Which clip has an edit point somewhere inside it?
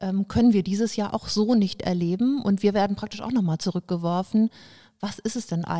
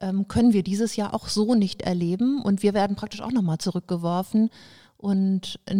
second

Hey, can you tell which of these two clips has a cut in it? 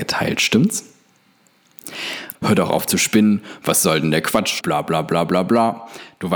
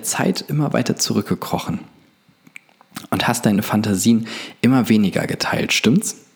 first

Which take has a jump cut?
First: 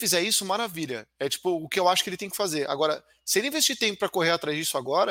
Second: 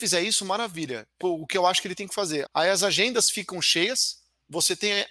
second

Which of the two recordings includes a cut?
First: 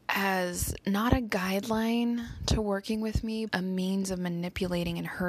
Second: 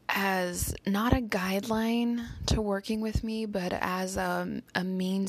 first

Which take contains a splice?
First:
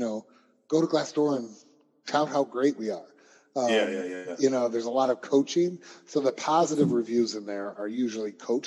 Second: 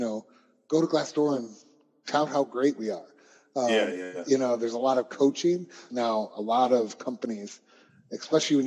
second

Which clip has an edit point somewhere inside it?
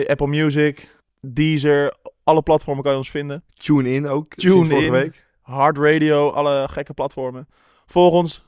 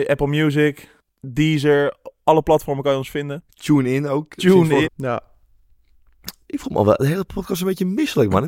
second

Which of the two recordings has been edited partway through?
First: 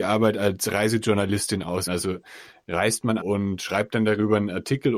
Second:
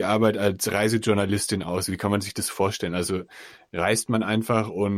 first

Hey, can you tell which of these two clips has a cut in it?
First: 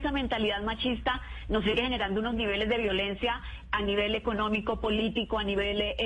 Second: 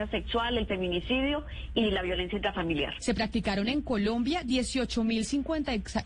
second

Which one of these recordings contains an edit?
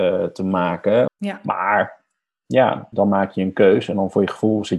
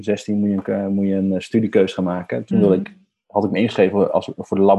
first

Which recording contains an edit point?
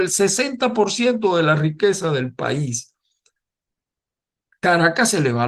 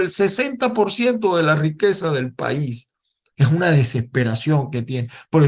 second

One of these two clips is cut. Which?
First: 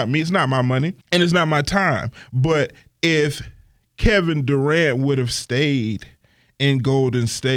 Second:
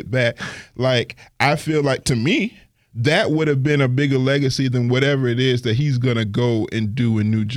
first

